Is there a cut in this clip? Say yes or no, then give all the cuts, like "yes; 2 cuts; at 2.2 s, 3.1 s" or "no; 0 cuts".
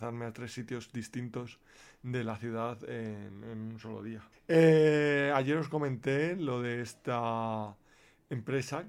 yes; 1 cut; at 4.3 s